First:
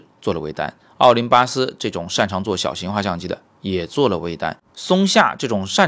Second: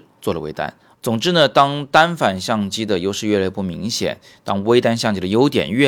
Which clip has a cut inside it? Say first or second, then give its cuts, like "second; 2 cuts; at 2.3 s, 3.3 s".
second; 1 cut; at 0.9 s